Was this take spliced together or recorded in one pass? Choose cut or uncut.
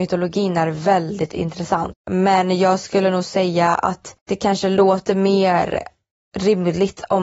cut